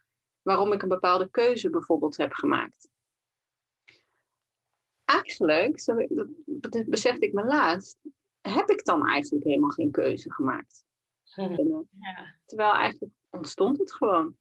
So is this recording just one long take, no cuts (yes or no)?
no